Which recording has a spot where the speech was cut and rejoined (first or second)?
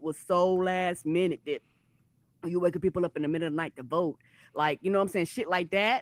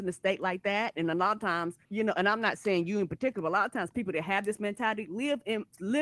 second